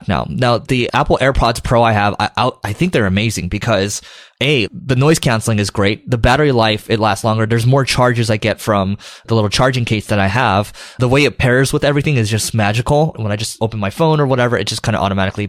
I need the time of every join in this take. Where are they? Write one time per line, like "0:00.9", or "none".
none